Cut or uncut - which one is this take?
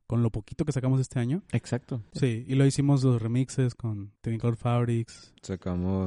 cut